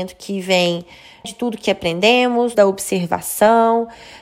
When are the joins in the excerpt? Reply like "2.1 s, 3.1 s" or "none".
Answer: 1.2 s, 2.5 s